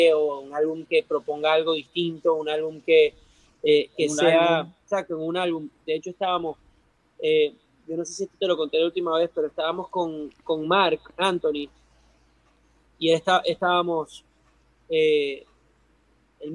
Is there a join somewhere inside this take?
no; 0 cuts

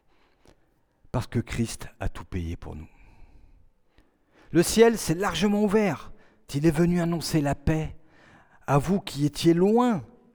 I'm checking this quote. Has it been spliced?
yes; 1 cut; at 6.5 s

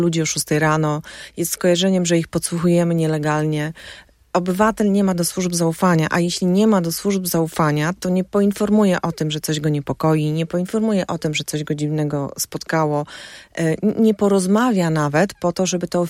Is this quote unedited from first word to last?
yes; 0 cuts

